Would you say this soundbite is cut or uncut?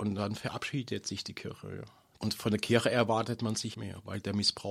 cut